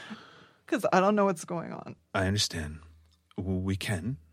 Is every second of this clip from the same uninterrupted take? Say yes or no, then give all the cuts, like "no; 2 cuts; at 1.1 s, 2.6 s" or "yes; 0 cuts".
yes; 0 cuts